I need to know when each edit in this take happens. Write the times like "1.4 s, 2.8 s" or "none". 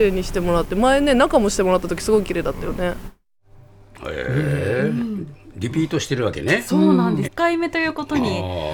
7.2 s